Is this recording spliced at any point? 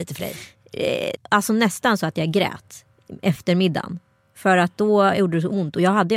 yes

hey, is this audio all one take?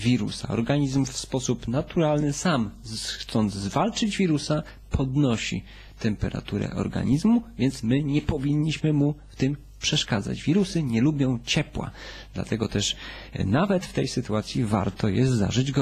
yes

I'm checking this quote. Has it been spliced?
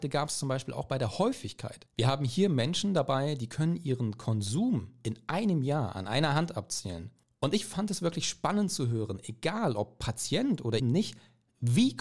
yes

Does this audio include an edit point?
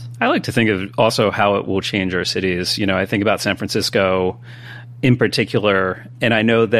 no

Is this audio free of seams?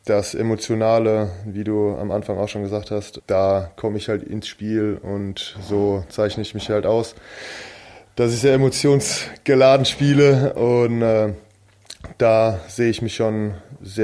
no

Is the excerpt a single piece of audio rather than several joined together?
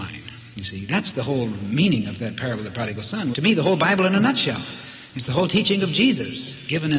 no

